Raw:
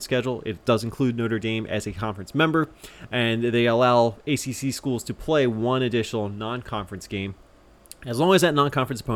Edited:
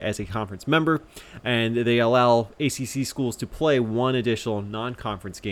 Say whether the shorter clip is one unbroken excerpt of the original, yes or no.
yes